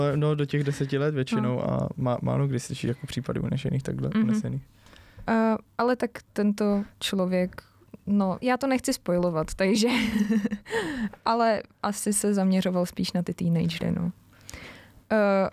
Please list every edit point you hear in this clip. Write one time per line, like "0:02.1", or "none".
0:08.4